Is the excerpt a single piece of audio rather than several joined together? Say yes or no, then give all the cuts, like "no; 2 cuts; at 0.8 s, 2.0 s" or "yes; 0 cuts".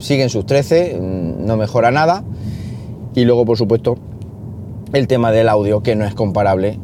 no; 1 cut; at 3.1 s